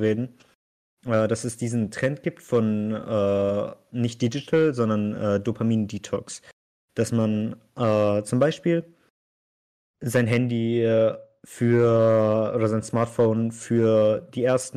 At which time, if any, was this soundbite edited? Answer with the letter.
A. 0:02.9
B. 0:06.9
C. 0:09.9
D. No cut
D